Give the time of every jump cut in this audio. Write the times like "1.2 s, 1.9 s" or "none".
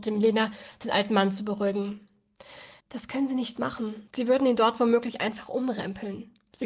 2.8 s, 4.1 s